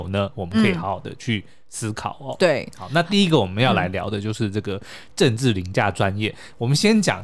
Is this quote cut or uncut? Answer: uncut